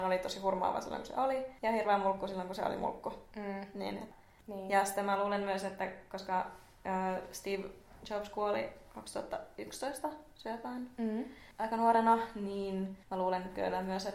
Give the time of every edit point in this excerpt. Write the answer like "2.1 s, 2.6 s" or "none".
none